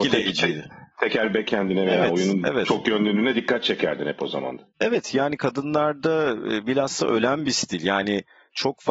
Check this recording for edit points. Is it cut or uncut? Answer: uncut